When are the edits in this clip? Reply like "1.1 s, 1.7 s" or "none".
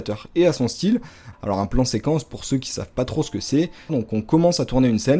1.3 s, 3.9 s